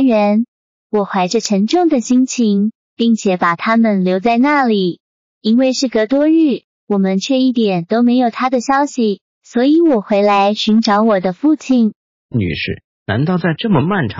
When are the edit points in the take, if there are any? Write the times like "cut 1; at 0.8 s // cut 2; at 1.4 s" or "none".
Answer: cut 1; at 2.8 s